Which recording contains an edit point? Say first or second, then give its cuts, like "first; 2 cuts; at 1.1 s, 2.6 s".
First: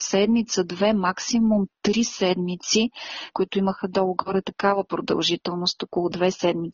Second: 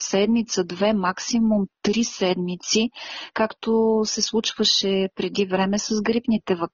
first; 1 cut; at 3.3 s